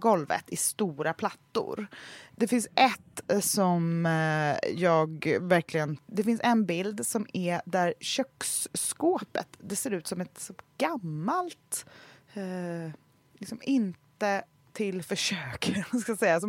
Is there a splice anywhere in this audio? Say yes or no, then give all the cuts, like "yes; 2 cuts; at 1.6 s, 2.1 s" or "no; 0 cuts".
yes; 2 cuts; at 2.3 s, 6.0 s